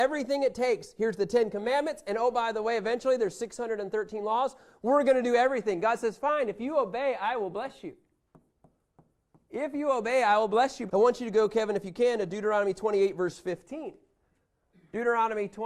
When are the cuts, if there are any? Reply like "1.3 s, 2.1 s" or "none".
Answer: 10.9 s